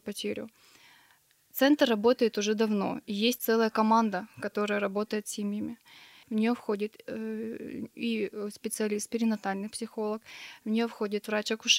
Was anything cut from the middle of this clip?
yes; 1 cut; at 6.2 s

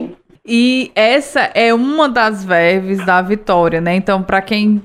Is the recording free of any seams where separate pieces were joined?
yes; 0 cuts

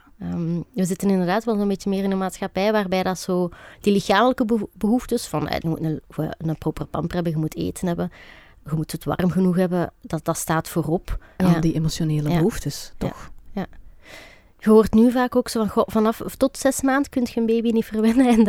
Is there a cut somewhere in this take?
yes; 2 cuts; at 5.6 s, 11.4 s

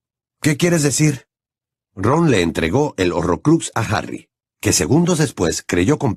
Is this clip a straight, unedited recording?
yes; 0 cuts

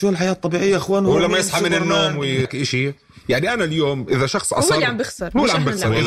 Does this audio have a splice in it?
yes; 1 cut; at 2.5 s

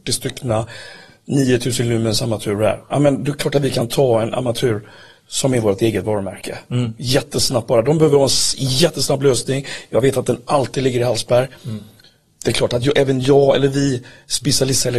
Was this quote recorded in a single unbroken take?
yes; 0 cuts

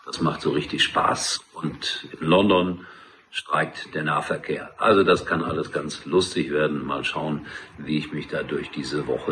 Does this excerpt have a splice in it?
no; 0 cuts

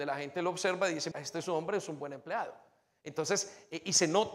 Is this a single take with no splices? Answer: no; 1 cut; at 1.1 s

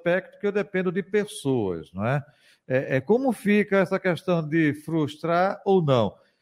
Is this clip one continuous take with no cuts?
yes; 0 cuts

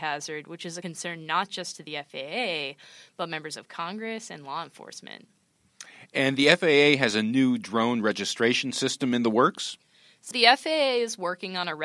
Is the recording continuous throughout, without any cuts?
yes; 0 cuts

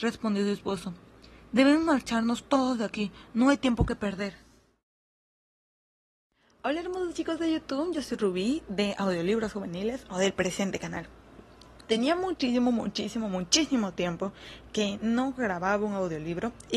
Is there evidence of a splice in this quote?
no; 0 cuts

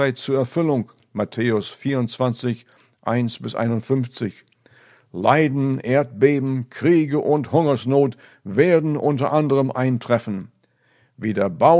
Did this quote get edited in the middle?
no; 0 cuts

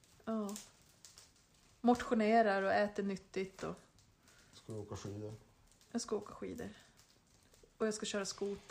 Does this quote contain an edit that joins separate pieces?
no; 0 cuts

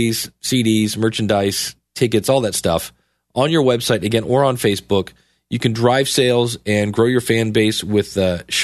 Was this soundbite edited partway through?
no; 0 cuts

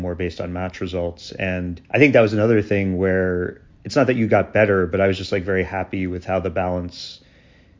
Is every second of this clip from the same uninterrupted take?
no; 1 cut; at 1.8 s

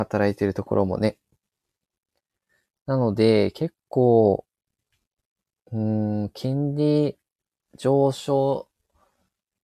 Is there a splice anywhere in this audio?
no; 0 cuts

